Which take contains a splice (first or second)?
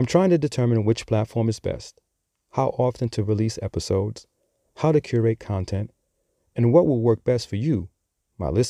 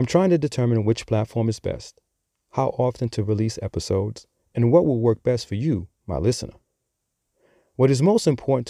second